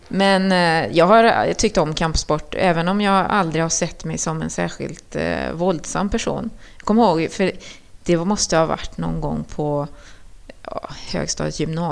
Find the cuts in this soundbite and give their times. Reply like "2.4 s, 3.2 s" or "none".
none